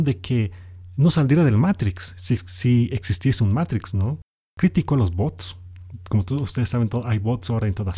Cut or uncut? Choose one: uncut